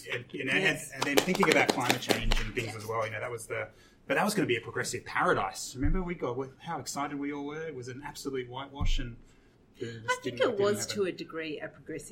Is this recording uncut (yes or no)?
yes